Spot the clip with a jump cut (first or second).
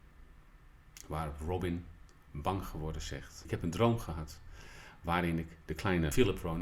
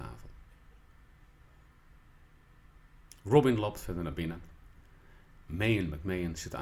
second